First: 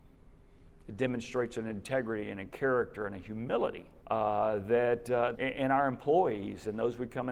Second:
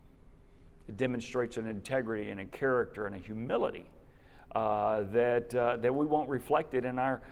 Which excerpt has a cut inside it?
first; 2 cuts; at 4.0 s, 5.3 s

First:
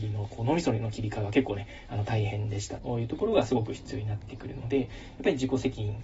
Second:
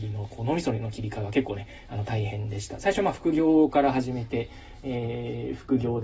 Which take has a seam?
first; 1 cut; at 2.8 s

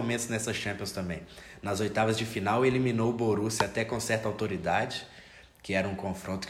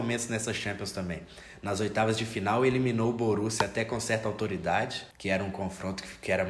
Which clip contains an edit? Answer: second; 1 cut; at 5.1 s

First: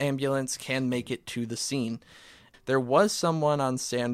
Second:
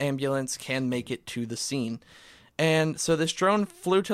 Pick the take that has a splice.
first; 1 cut; at 2.5 s

